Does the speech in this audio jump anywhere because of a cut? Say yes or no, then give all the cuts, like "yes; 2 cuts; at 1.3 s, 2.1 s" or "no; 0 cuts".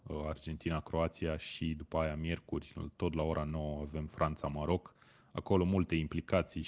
no; 0 cuts